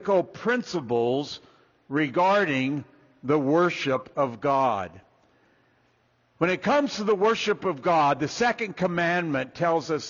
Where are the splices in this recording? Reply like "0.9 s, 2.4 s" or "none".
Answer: none

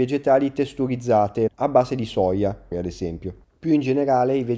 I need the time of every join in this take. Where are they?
1.5 s, 2.7 s

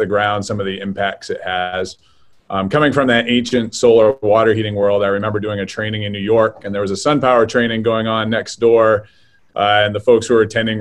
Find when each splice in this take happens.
none

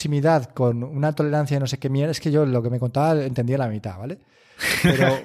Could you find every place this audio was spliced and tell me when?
none

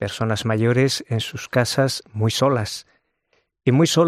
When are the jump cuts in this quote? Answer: none

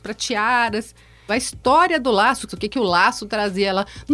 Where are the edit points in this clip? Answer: 1.3 s, 2.5 s

